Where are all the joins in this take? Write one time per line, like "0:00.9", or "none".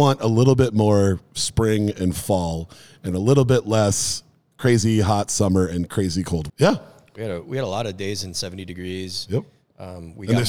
0:06.5